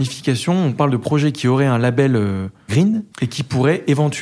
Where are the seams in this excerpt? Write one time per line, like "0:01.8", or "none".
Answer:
0:03.1